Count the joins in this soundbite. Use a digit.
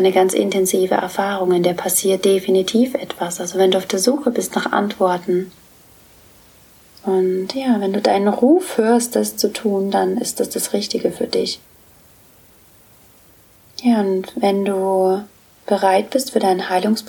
0